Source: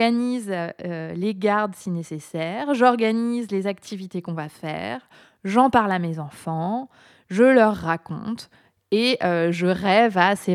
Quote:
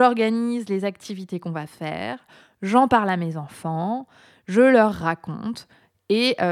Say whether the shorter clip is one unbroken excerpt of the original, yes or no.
yes